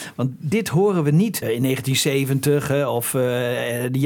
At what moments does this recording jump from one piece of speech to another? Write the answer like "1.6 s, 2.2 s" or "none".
1.4 s